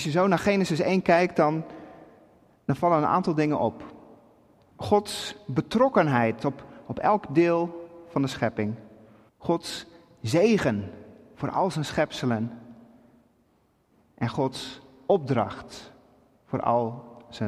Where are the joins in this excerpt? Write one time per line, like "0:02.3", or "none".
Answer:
0:04.7
0:09.3